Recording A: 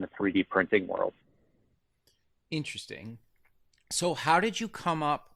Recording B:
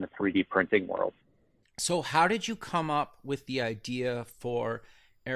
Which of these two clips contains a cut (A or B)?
B